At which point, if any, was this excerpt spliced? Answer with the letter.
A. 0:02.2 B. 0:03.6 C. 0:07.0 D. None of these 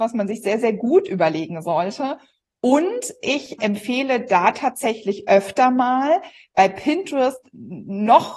B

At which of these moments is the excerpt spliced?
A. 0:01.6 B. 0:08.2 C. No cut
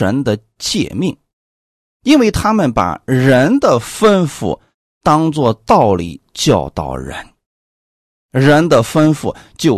C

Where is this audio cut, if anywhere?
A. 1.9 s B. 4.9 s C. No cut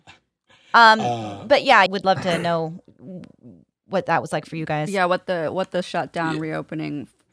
A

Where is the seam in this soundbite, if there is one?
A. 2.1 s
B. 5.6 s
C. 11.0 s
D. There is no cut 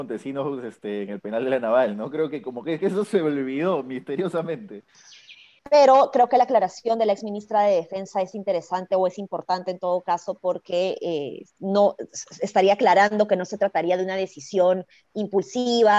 B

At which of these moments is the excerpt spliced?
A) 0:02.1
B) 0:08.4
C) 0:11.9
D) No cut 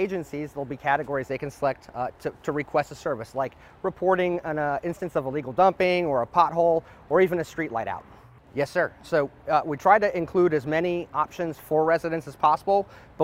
B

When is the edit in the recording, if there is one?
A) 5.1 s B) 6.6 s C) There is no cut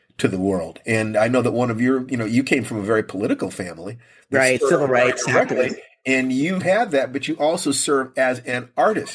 B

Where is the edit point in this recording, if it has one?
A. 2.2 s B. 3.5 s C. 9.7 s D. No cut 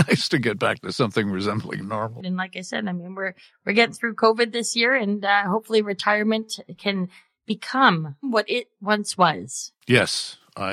A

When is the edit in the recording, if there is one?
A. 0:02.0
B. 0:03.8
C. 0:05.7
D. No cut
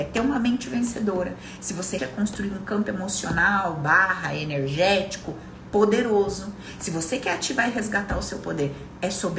A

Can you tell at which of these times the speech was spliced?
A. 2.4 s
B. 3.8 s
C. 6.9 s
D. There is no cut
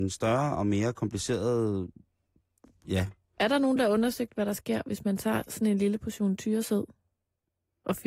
D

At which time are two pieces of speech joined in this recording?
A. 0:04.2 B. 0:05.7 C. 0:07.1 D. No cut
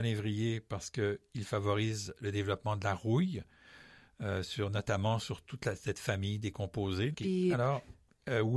C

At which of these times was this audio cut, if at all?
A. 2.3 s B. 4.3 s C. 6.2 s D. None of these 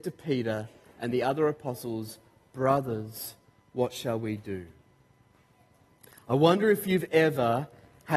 D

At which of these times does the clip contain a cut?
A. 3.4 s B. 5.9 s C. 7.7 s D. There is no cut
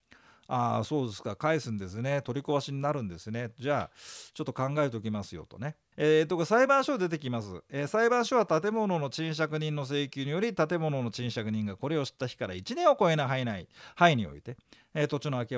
B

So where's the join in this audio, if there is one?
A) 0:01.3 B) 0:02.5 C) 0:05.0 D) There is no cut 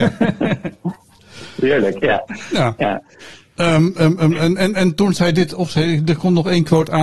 D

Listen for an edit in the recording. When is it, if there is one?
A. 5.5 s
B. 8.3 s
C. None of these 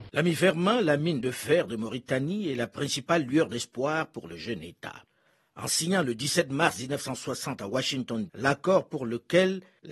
B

